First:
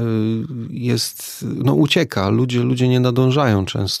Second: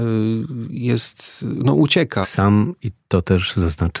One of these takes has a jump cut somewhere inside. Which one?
second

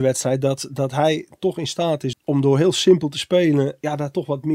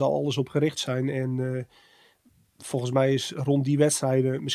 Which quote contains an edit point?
first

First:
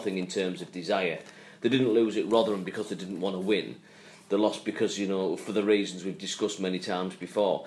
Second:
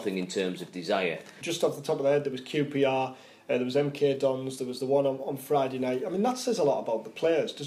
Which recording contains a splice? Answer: second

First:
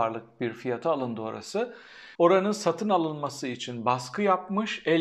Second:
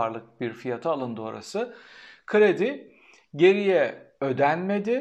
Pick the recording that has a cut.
first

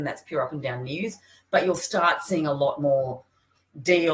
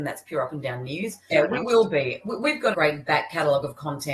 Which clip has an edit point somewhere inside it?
second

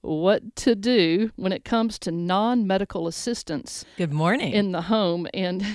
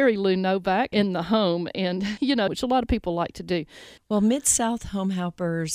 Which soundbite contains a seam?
second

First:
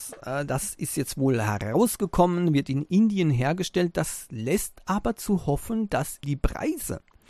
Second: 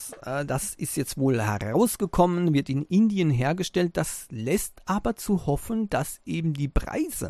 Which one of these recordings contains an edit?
first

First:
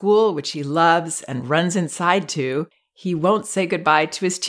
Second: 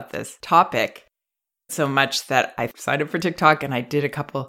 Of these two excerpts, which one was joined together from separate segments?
second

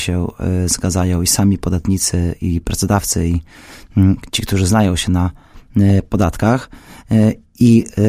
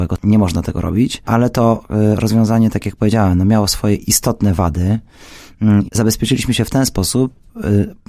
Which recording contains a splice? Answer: second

